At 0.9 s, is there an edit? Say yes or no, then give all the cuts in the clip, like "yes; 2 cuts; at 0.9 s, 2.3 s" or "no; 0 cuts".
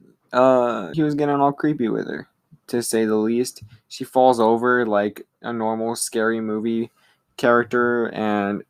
yes; 1 cut; at 0.9 s